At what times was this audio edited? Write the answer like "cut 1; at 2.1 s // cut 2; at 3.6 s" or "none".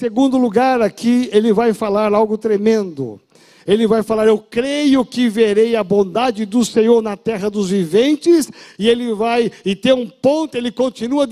none